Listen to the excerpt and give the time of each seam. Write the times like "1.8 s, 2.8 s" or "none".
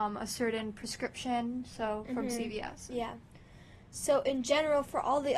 none

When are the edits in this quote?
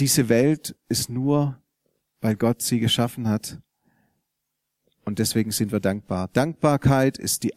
none

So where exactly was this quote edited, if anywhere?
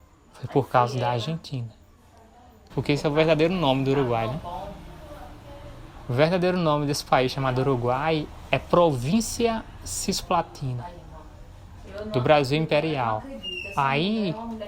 2.7 s

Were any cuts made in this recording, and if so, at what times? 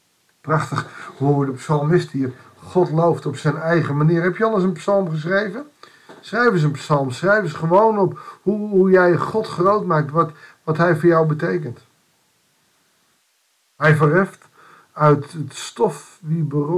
none

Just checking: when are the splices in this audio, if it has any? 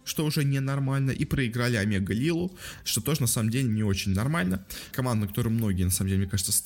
4.9 s

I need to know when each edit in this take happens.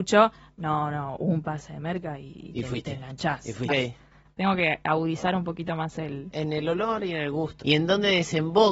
3.7 s, 7.6 s

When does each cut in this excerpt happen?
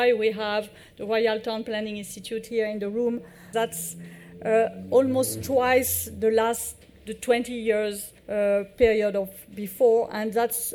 3.5 s, 8.2 s

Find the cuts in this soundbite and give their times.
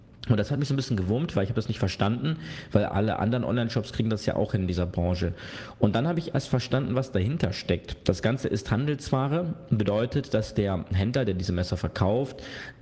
none

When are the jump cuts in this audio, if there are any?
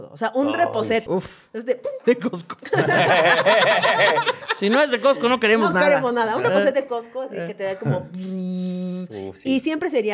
1.1 s

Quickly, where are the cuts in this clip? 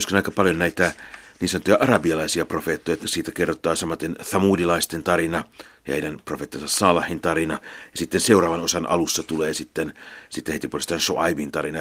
3.0 s

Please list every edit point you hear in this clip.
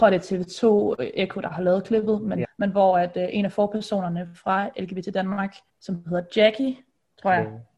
2.4 s, 5.7 s

